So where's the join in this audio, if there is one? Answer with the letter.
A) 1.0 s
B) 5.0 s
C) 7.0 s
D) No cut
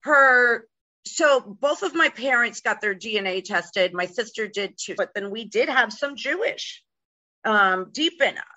B